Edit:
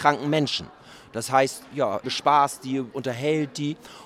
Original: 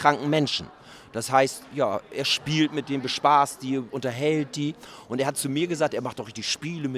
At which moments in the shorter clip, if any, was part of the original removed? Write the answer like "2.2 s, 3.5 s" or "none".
2.0 s